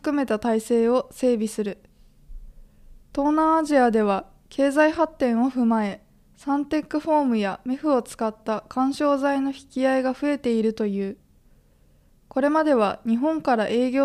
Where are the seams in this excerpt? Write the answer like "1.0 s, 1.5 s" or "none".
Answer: 3.0 s